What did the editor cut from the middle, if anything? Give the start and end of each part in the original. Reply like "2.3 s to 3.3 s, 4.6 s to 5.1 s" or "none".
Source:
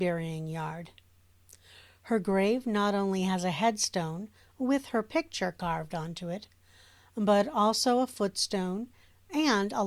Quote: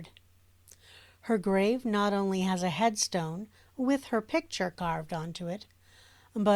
none